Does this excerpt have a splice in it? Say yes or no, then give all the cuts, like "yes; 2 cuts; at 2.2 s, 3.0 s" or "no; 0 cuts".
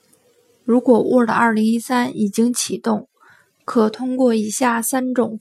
no; 0 cuts